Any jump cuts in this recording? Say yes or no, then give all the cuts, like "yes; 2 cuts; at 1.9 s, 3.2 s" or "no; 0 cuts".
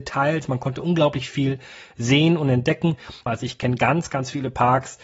yes; 1 cut; at 3.3 s